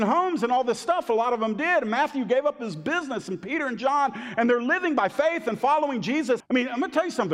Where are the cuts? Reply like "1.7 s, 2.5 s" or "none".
6.4 s